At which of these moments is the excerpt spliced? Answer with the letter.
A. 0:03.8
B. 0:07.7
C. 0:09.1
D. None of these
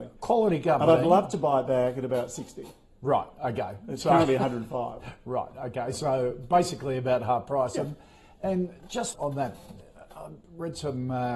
C